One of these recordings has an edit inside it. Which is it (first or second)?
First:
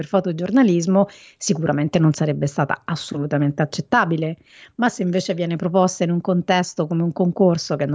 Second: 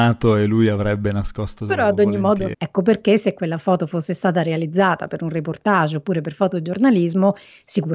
second